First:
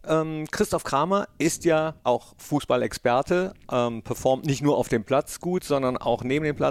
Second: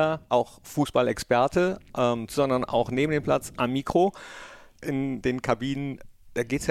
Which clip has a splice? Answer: second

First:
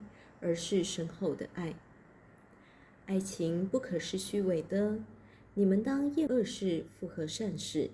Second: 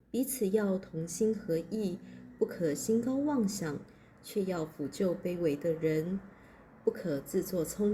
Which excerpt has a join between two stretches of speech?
first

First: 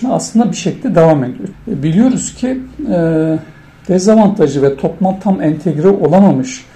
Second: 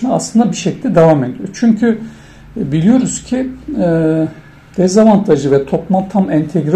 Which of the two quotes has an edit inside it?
first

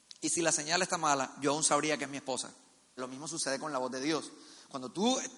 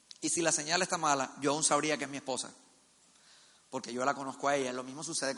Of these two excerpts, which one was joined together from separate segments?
first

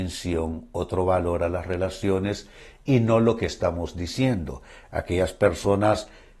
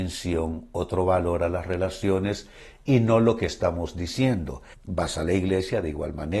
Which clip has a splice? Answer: second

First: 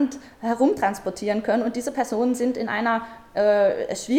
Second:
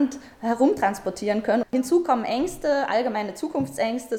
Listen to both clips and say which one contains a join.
second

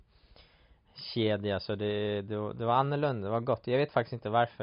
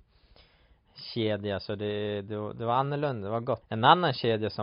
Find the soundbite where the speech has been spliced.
second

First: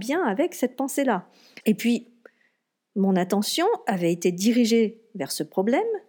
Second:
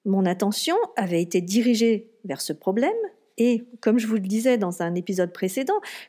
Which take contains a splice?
first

